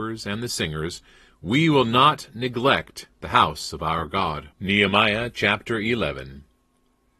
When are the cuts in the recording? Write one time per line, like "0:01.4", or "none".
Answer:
0:04.5